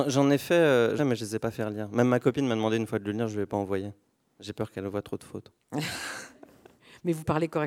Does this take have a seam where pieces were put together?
yes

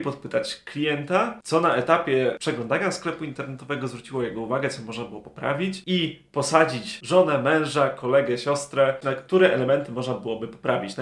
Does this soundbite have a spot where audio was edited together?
yes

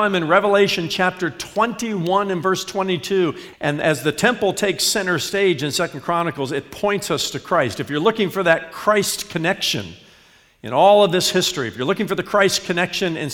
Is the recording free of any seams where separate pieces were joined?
no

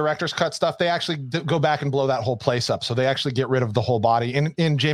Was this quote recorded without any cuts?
yes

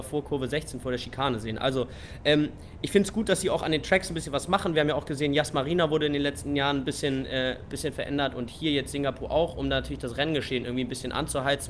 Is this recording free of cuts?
yes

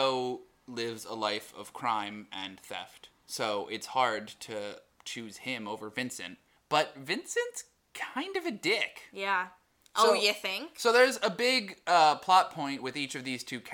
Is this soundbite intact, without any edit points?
yes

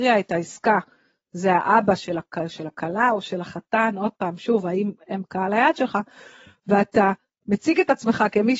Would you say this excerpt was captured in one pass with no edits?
yes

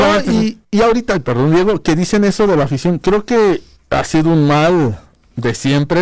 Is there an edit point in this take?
no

